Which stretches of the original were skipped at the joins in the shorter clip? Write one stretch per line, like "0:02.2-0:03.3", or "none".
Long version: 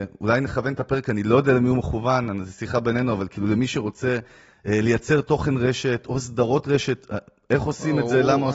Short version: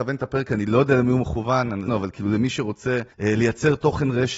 0:02.5-0:03.1
0:04.3-0:04.6